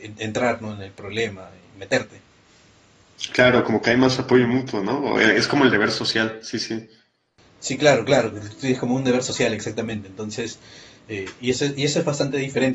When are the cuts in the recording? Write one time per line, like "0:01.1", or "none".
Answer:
none

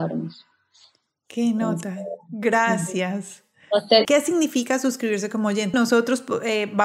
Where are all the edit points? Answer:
0:04.0
0:05.7

